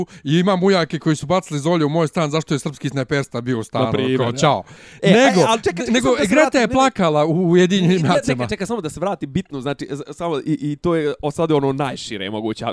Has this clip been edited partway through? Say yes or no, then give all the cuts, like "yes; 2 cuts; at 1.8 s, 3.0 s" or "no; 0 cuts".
no; 0 cuts